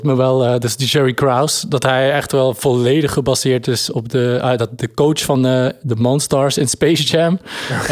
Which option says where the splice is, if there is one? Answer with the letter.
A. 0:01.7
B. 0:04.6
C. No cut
C